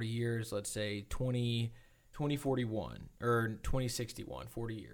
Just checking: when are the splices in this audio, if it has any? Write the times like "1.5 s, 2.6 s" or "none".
2.1 s